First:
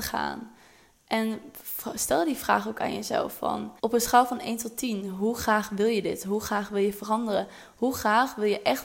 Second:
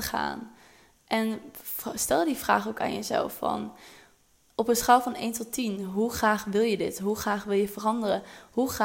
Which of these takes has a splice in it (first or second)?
first